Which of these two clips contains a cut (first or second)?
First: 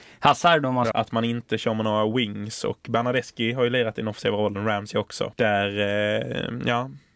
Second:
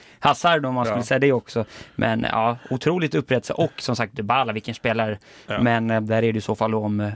first